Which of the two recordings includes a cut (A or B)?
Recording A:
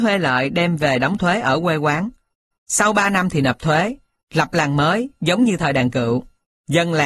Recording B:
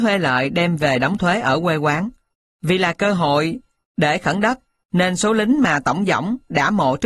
A